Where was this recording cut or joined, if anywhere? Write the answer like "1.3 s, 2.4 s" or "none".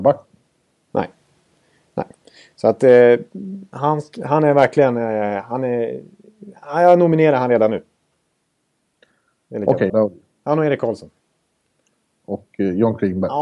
3.7 s, 9.9 s